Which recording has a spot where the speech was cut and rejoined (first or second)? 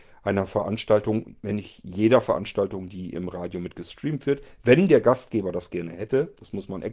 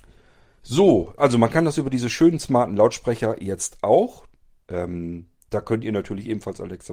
second